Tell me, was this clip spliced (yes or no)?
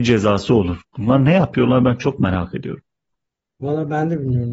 no